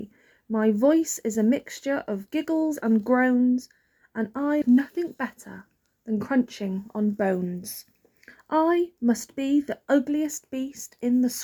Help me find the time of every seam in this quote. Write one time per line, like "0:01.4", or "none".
0:04.6